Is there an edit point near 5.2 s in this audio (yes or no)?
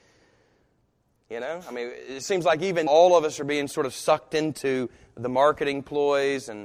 no